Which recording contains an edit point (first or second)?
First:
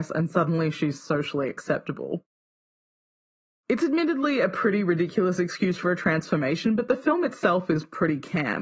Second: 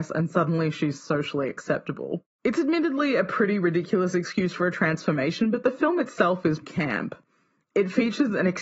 second